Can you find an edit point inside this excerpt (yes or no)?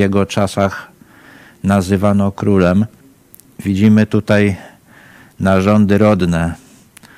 no